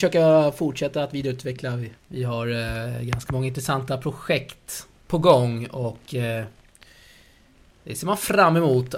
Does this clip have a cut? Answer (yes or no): yes